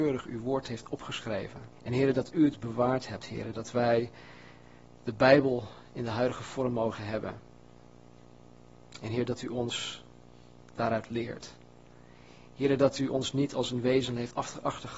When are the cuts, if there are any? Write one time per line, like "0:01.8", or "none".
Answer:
0:01.7